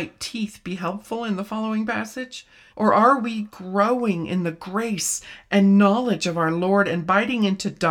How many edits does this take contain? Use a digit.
1